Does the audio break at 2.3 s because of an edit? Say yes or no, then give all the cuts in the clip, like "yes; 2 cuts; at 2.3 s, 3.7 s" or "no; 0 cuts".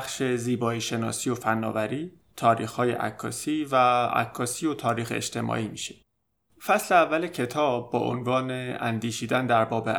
yes; 2 cuts; at 2.3 s, 6.5 s